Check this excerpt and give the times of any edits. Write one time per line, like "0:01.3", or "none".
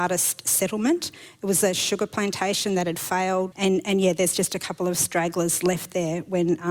0:03.5